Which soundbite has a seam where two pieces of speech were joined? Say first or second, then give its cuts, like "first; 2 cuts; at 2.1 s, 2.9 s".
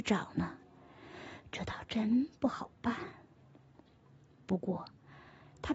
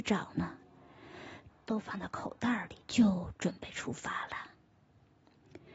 second; 2 cuts; at 1.5 s, 2.8 s